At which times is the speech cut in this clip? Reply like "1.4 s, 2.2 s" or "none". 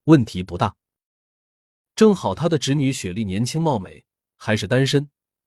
1.9 s